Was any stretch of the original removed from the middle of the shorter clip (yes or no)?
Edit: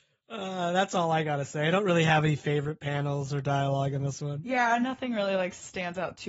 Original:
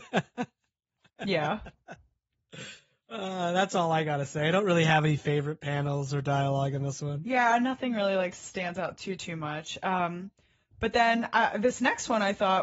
no